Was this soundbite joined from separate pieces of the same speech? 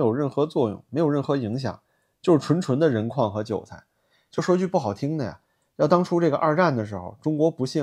no; 0 cuts

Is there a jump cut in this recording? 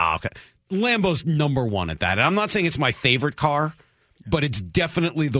no; 0 cuts

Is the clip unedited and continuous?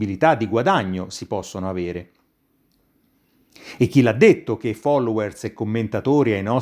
yes; 0 cuts

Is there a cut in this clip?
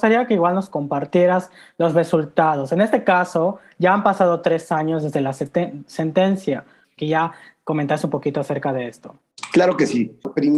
yes; 1 cut; at 7.0 s

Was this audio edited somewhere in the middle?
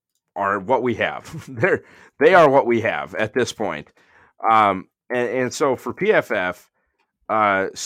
no; 0 cuts

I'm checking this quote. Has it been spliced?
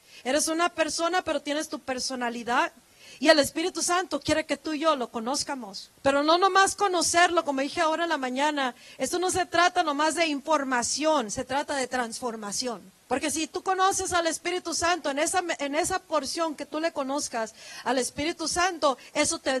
yes; 2 cuts; at 5.9 s, 13.0 s

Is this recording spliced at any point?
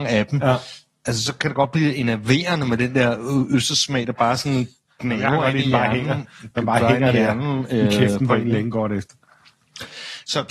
no; 0 cuts

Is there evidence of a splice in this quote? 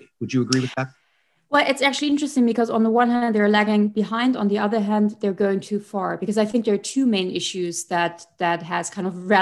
no; 0 cuts

